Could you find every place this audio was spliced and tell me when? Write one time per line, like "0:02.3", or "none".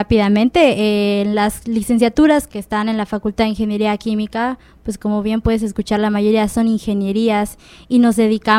0:02.5